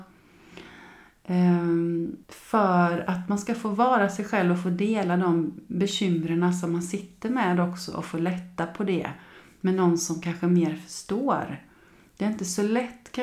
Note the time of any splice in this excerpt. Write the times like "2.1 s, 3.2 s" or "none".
2.2 s